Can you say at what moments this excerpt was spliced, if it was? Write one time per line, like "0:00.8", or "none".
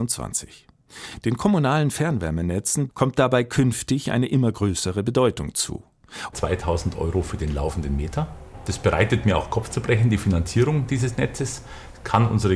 0:02.9
0:06.3

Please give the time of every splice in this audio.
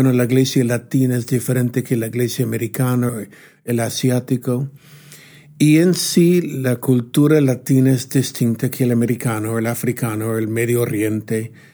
0:03.1

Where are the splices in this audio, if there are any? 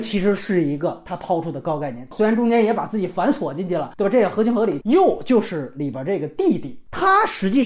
0:04.8

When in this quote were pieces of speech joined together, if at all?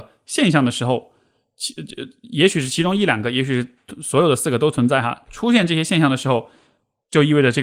none

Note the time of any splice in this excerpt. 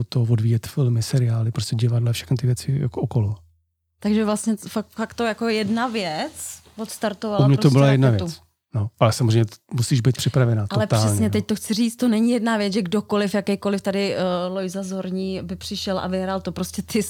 none

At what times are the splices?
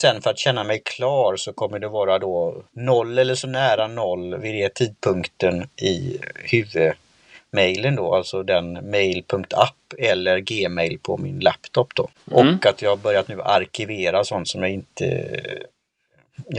0:02.7
0:12.1

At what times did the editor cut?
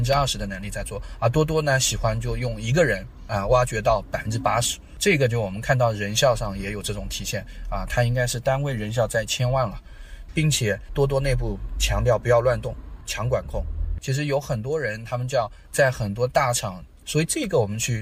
0:14.0
0:17.0

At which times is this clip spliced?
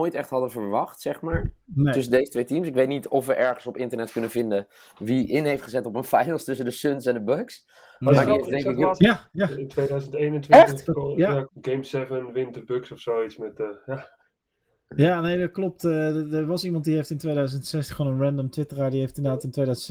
0:09.0
0:11.4

